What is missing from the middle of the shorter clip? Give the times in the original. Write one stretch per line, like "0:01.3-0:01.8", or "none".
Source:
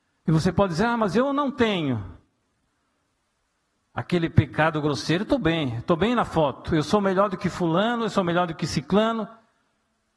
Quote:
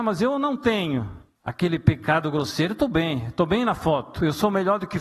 0:02.3-0:03.8